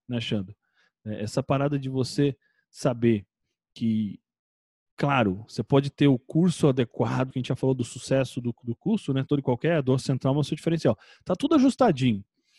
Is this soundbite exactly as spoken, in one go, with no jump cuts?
no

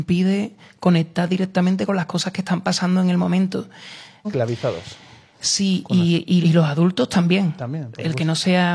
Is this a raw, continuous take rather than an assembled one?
no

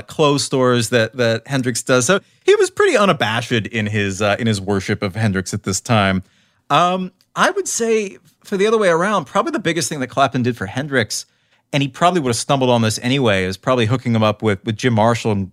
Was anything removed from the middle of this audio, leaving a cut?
no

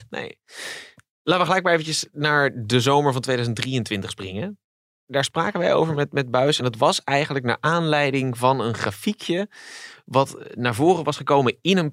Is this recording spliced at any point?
no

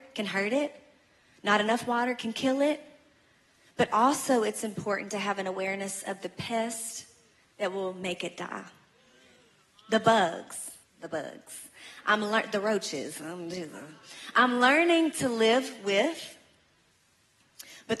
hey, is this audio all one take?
no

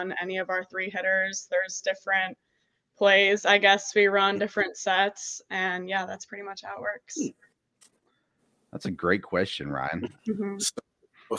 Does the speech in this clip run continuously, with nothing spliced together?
no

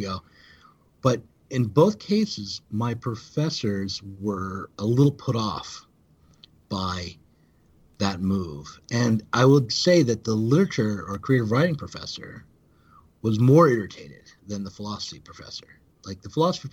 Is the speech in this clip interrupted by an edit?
no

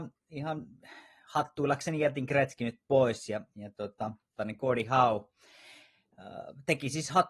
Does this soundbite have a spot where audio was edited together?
yes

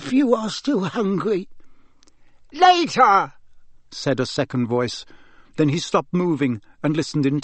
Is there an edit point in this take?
yes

